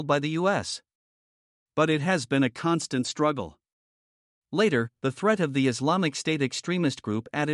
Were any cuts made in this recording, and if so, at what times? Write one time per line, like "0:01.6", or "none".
0:04.4